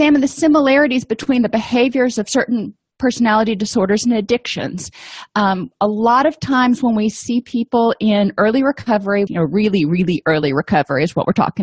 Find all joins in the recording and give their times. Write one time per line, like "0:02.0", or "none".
0:09.3